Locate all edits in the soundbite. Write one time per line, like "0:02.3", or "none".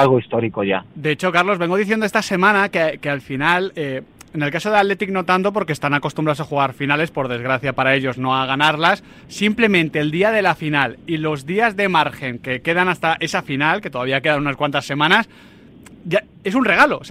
0:09.3